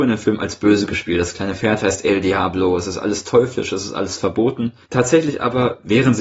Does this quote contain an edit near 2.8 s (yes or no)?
no